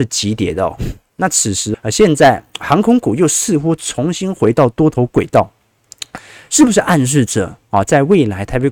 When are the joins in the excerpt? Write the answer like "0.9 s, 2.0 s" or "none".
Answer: 1.7 s